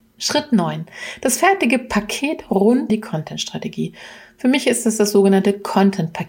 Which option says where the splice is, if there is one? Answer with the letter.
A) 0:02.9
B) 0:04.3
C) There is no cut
A